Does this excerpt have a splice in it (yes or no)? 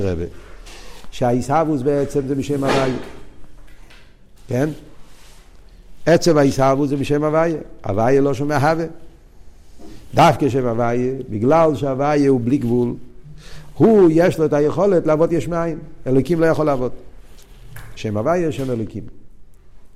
yes